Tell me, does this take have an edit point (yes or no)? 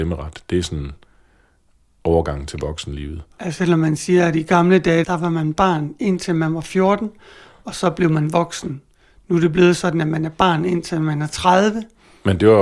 no